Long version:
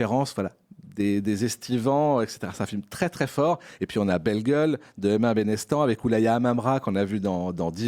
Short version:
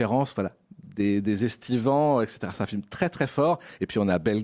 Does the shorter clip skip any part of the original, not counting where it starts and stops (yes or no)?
no